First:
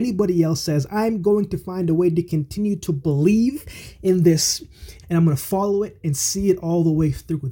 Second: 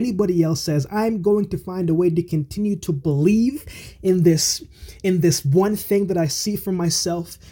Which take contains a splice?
first; 1 cut; at 5.0 s

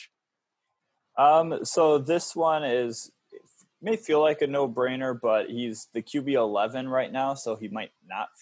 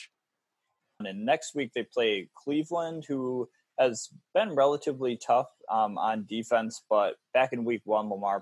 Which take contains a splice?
second; 1 cut; at 1.0 s

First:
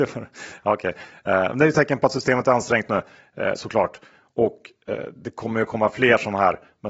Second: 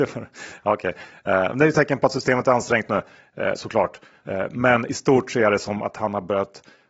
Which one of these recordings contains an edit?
second; 1 cut; at 4.2 s

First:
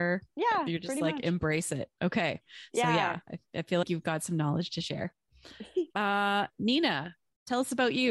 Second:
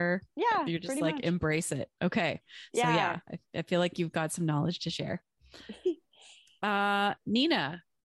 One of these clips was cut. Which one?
first; 2 cuts; at 3.8 s, 5.9 s

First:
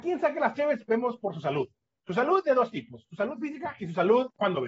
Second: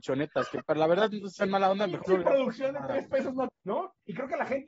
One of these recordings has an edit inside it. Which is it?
second; 1 cut; at 3.5 s

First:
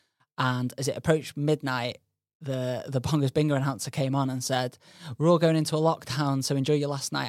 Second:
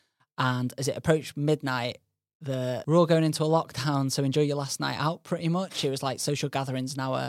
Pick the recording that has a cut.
second; 1 cut; at 2.8 s

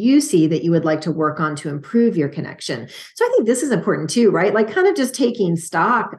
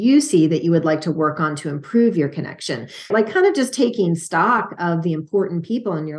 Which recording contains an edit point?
second; 1 cut; at 3.1 s

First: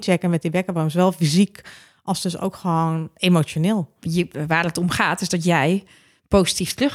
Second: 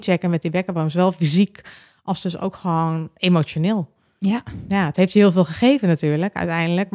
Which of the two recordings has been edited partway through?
first; 1 cut; at 4.0 s

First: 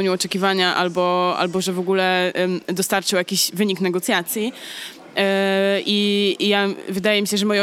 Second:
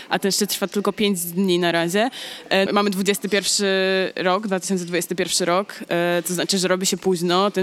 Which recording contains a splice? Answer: second; 1 cut; at 2.7 s

